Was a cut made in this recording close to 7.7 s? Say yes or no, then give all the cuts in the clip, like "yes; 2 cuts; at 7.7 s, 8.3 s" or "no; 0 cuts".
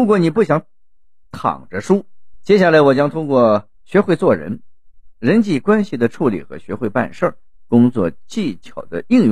no; 2 cuts; at 2.3 s, 3.7 s